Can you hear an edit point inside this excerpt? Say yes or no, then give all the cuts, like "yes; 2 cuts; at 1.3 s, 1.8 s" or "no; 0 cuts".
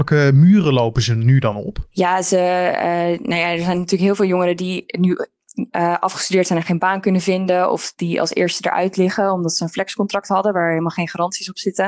no; 0 cuts